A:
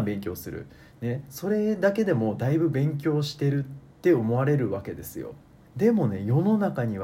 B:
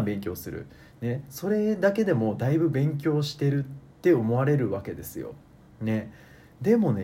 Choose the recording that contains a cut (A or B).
A